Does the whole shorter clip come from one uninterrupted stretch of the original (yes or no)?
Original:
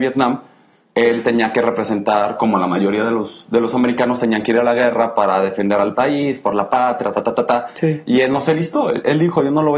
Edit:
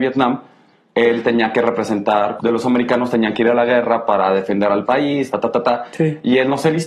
no